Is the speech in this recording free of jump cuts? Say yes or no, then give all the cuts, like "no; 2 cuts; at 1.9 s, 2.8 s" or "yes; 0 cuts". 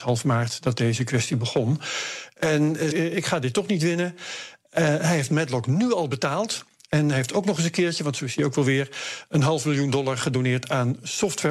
no; 1 cut; at 2.9 s